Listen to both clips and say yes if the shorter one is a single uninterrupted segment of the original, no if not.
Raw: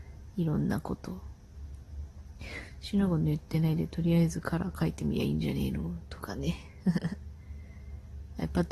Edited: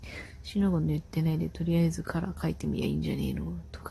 yes